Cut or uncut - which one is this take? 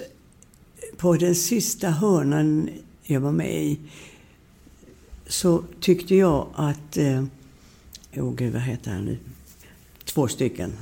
cut